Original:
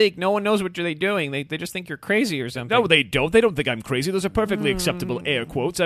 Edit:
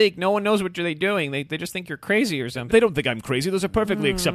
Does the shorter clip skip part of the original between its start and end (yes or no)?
yes